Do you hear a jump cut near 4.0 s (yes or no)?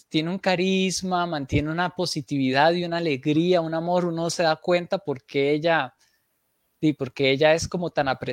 no